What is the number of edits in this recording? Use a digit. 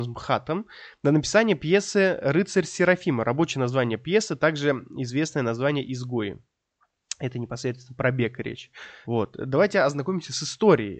1